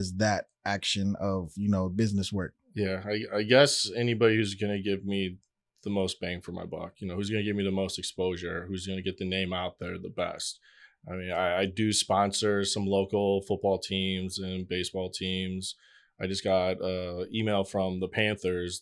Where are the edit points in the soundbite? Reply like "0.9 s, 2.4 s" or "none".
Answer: none

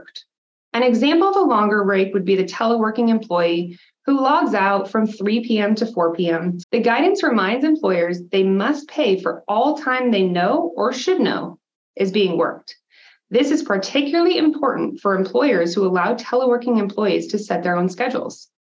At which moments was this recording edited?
6.6 s

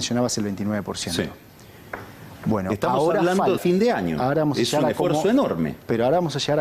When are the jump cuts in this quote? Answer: 3.6 s

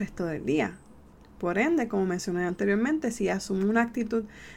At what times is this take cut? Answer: none

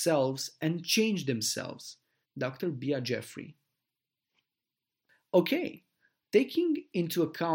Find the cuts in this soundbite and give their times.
2.2 s

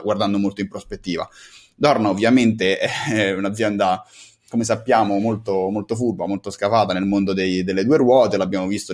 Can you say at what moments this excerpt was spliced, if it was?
none

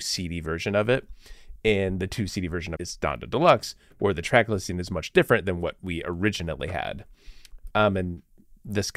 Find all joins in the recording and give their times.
2.8 s, 7.7 s

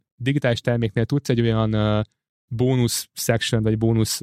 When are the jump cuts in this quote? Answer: none

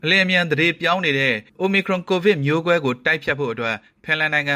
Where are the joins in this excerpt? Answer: none

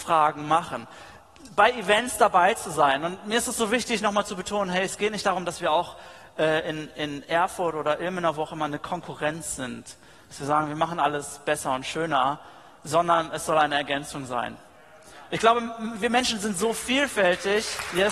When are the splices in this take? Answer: none

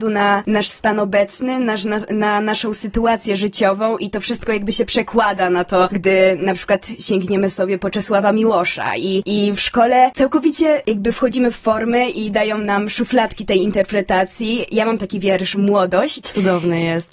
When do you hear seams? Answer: 15.5 s

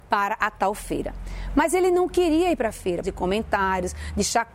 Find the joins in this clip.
3.0 s

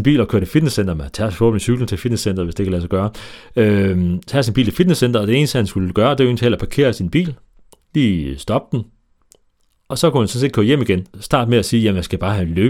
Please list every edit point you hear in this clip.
11.1 s

